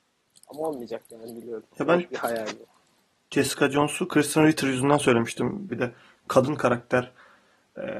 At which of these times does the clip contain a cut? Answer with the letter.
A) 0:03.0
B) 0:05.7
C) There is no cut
B